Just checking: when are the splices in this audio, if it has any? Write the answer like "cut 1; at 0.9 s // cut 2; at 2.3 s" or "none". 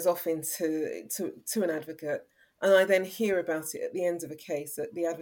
none